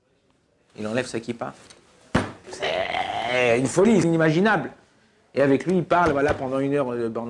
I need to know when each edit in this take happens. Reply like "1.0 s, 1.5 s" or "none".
2.4 s, 4.0 s